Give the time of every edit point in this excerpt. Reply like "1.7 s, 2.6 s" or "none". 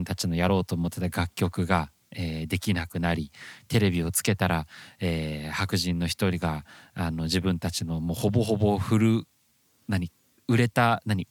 none